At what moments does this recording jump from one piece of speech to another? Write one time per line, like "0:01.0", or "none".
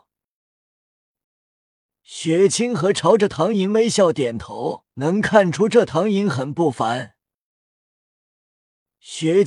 0:01.2
0:04.9
0:08.2